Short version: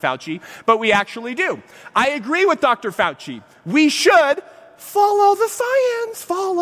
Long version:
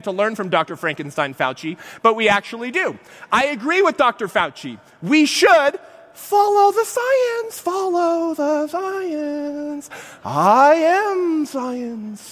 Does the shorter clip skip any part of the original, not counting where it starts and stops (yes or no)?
no